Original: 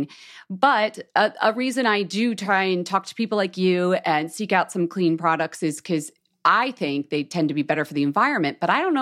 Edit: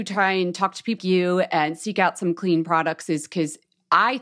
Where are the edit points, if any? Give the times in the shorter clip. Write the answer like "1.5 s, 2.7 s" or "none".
1.0 s

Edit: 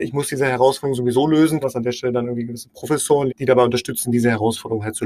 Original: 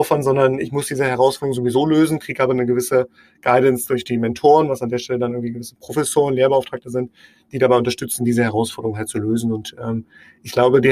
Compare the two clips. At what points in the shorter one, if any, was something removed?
1.6 s, 3.3 s

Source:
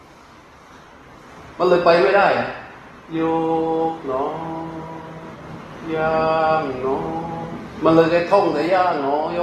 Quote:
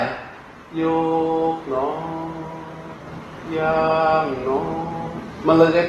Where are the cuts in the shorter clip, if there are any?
none

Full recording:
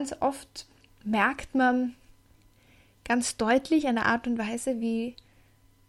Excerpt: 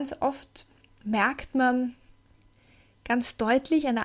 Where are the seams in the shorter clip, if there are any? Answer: none

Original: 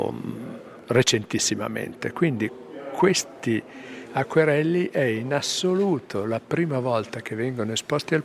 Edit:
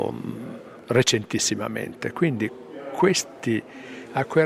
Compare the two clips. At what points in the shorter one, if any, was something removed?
none

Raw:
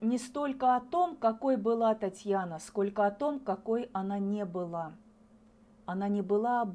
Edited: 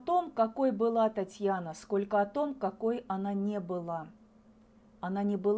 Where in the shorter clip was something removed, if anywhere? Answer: none

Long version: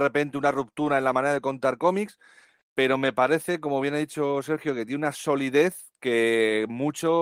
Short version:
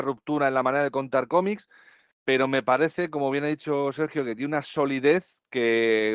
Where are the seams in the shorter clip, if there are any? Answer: none

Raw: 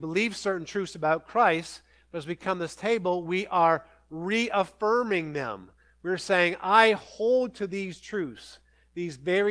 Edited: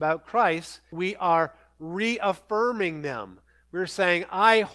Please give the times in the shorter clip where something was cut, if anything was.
0.9 s

